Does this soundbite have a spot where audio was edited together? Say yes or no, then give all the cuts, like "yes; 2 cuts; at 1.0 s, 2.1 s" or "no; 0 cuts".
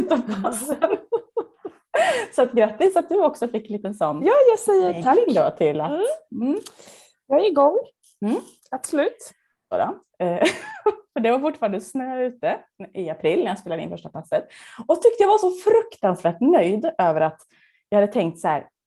yes; 1 cut; at 9.7 s